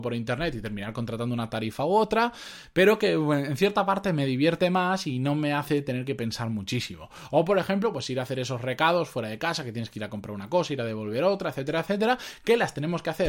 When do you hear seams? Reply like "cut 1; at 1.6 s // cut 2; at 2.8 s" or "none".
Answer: none